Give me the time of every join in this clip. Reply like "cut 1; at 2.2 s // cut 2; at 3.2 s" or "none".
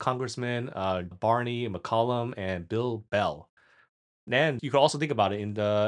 cut 1; at 1.1 s // cut 2; at 4.1 s

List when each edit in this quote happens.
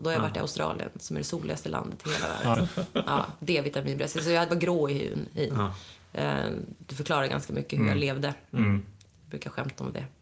cut 1; at 2.5 s

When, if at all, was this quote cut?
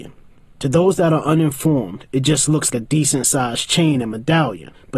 cut 1; at 2.7 s

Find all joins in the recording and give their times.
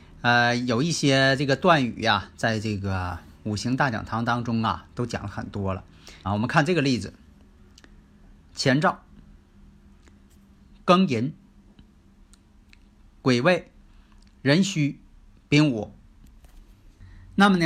cut 1; at 6.2 s

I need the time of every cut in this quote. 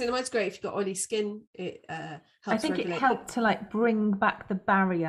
cut 1; at 1.5 s

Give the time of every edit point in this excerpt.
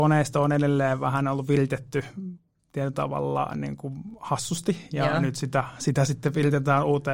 none

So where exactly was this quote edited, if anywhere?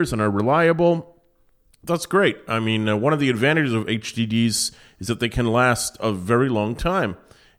none

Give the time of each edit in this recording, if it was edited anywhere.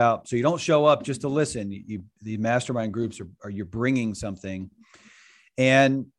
none

